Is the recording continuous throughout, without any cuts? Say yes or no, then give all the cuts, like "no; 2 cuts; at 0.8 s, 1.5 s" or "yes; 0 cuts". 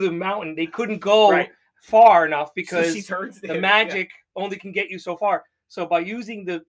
yes; 0 cuts